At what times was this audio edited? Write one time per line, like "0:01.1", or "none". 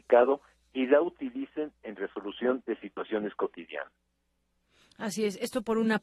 none